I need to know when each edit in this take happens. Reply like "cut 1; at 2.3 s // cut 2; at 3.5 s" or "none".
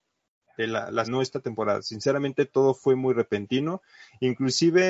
cut 1; at 1.0 s